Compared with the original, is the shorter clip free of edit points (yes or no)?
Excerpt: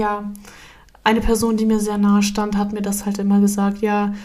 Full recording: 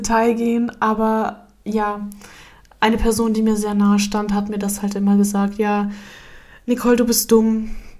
yes